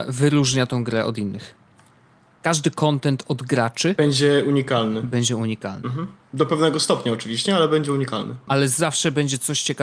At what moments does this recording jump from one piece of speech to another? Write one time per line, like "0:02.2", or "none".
0:08.5